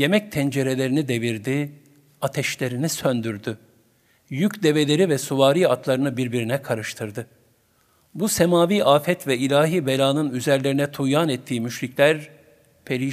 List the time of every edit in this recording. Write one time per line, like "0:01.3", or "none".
none